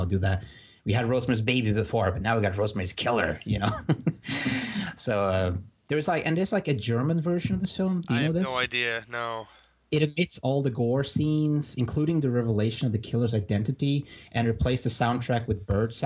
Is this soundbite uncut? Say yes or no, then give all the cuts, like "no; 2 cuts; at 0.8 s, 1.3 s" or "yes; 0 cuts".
yes; 0 cuts